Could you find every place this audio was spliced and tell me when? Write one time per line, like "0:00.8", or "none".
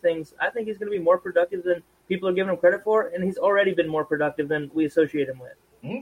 none